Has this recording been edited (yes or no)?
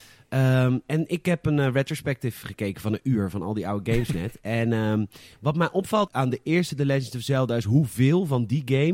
yes